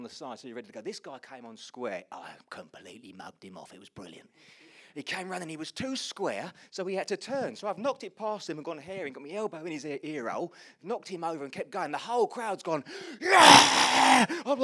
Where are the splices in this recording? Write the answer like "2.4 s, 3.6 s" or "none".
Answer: none

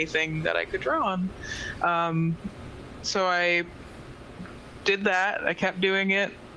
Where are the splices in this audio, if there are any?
none

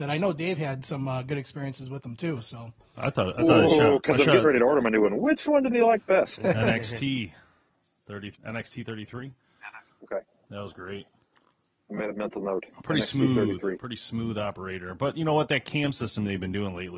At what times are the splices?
8.3 s

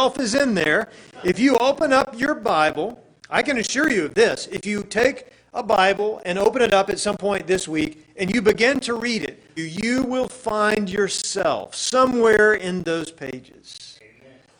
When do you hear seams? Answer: 9.6 s

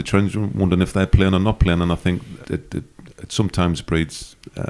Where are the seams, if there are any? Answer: 2.4 s

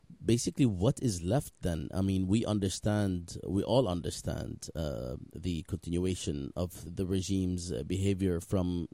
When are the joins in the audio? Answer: 6.9 s

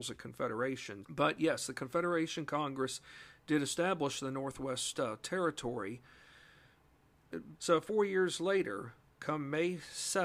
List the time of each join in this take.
1.0 s, 7.5 s

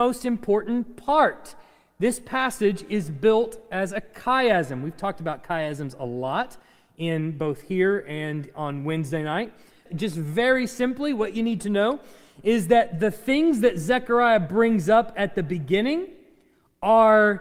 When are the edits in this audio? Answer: 9.9 s

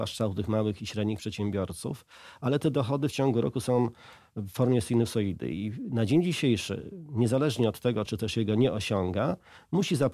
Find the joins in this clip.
8.1 s

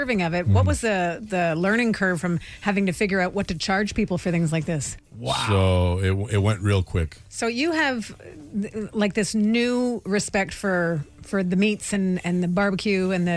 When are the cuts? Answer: 5.0 s

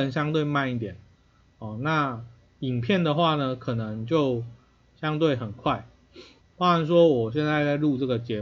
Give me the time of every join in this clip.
6.4 s

